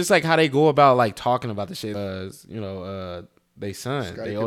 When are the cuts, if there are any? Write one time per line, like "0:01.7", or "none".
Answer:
0:01.9